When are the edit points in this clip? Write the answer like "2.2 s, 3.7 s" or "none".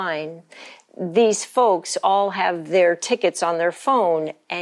none